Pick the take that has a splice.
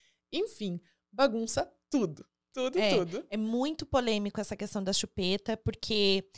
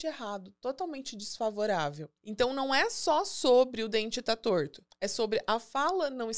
second; 2 cuts; at 2.2 s, 4.9 s

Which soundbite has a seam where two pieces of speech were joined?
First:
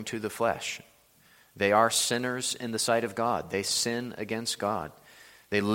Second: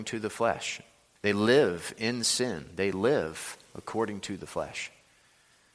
second; 1 cut; at 1.2 s

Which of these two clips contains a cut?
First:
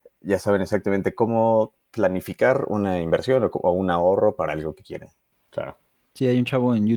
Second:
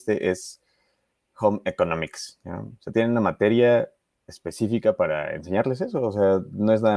first; 1 cut; at 5.3 s

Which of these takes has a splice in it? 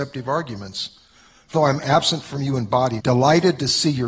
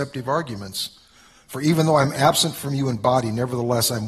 first; 2 cuts; at 1.5 s, 3.0 s

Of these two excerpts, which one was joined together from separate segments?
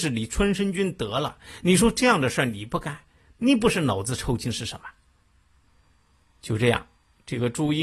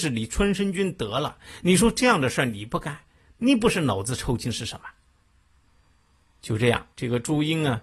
second; 1 cut; at 6.9 s

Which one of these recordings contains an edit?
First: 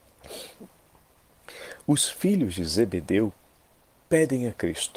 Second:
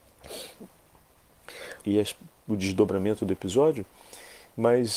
second; 1 cut; at 1.8 s

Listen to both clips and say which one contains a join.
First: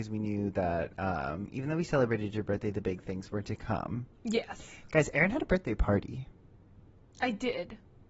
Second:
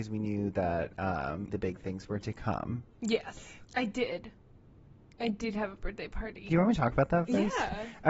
second; 3 cuts; at 1.5 s, 3.7 s, 6.5 s

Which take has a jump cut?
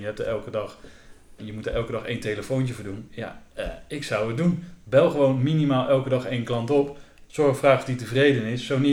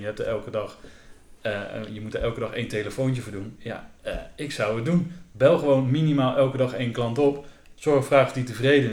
first; 1 cut; at 1.4 s

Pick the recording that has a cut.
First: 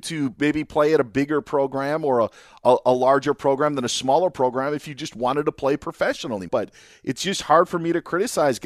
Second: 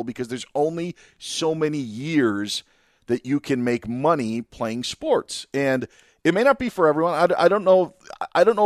first; 1 cut; at 6.5 s

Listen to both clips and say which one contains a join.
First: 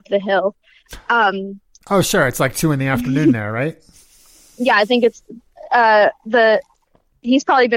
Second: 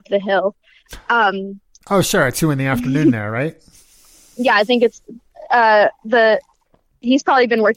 second; 1 cut; at 2.3 s

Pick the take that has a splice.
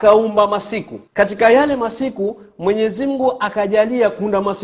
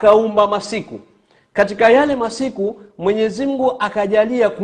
first; 1 cut; at 1.1 s

